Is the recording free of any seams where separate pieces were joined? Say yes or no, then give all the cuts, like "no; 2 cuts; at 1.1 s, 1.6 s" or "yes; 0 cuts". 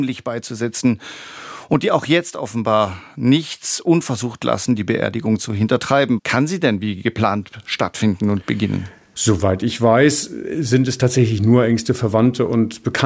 no; 2 cuts; at 6.2 s, 9.1 s